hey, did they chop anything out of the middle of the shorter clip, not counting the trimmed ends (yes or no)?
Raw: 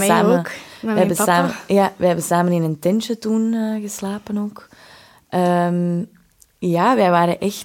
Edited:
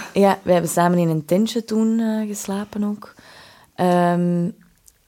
no